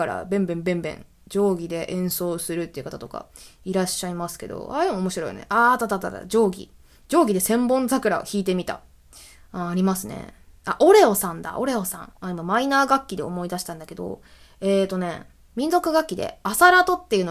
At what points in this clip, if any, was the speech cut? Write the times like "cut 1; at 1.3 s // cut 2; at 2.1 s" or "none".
cut 1; at 12.1 s

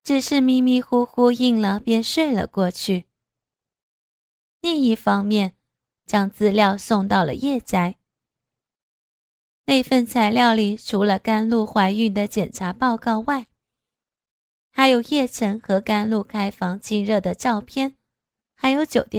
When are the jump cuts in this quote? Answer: cut 1; at 6.0 s

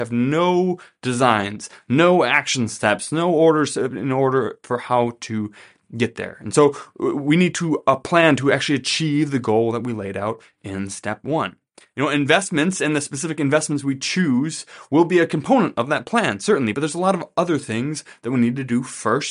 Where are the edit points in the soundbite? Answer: none

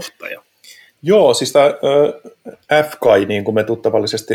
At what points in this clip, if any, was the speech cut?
cut 1; at 0.9 s

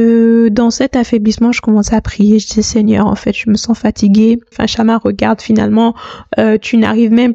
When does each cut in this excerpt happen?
cut 1; at 4.5 s

